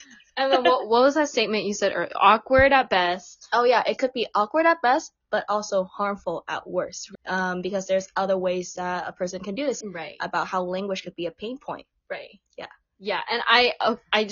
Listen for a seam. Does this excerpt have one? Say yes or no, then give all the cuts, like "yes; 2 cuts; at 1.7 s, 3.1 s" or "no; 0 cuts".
yes; 2 cuts; at 7.1 s, 9.8 s